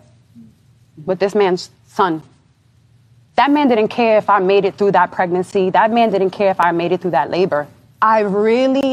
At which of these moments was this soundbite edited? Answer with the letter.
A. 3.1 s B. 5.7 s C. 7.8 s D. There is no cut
D